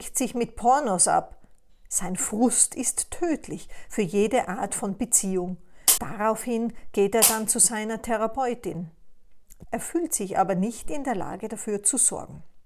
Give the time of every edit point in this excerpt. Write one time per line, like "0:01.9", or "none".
0:06.0
0:09.6